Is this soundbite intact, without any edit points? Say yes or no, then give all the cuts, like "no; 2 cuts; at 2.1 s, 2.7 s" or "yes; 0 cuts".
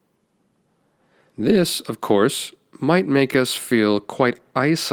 no; 1 cut; at 1.3 s